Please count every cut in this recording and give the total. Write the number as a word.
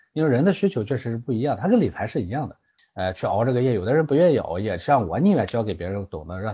one